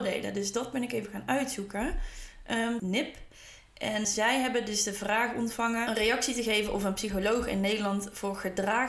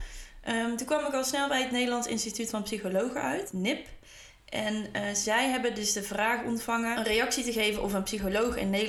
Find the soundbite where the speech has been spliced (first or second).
first